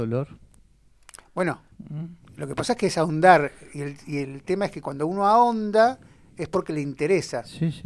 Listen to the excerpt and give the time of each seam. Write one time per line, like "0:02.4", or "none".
0:01.7

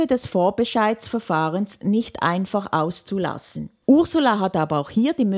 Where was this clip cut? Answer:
0:03.8

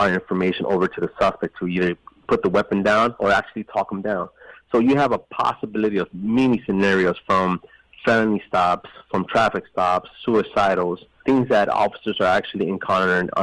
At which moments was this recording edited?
none

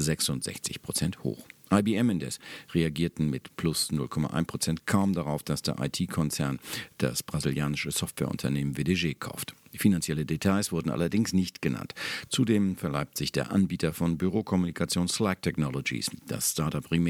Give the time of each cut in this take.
none

